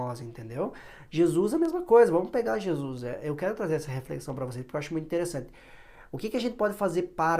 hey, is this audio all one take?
yes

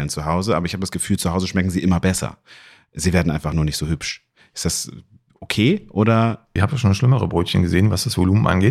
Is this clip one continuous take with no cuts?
no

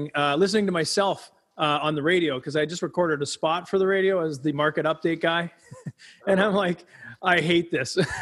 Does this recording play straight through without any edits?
yes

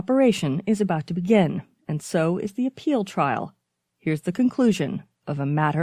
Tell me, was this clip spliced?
no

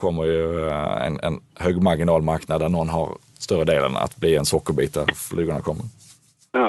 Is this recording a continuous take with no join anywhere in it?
yes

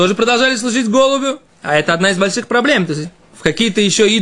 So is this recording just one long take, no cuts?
no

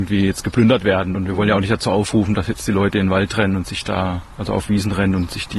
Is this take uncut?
yes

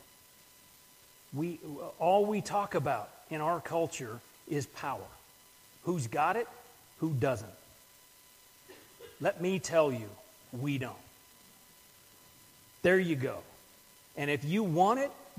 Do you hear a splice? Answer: yes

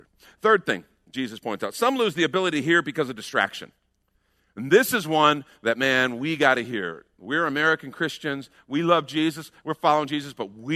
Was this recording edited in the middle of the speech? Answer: no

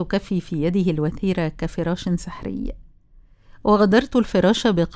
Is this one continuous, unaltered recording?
yes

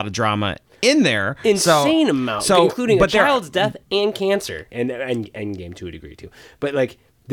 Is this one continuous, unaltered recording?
no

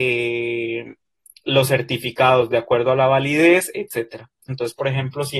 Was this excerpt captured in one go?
no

